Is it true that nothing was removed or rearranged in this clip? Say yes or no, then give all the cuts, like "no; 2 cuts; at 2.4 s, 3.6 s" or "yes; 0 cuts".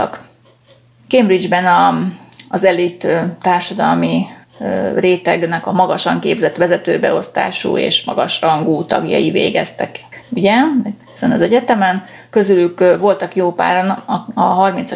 yes; 0 cuts